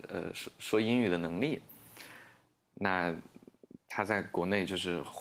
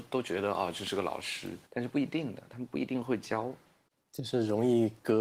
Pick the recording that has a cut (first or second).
second